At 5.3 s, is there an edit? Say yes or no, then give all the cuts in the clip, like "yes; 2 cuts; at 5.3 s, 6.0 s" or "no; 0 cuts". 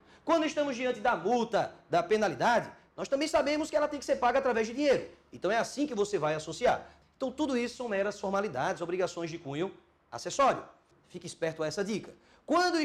no; 2 cuts; at 7.0 s, 10.9 s